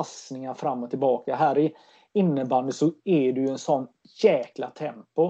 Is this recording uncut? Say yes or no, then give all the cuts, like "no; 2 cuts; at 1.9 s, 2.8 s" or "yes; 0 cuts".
yes; 0 cuts